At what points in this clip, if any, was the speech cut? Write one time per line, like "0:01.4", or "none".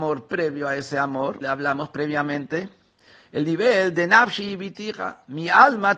0:01.4